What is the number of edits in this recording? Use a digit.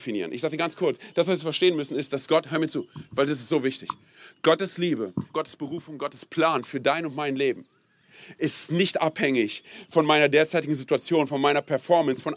2